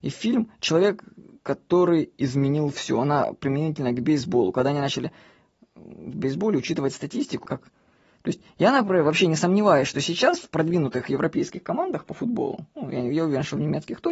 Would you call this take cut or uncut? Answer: cut